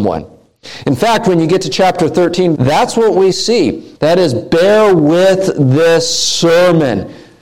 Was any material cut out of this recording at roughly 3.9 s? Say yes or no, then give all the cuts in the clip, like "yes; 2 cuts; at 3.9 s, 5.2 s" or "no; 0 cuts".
yes; 2 cuts; at 2.5 s, 3.9 s